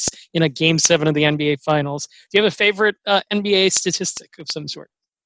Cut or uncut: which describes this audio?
uncut